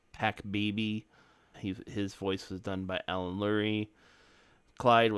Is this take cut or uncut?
cut